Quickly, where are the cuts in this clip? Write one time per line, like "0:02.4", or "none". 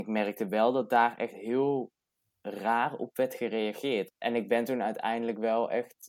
0:04.1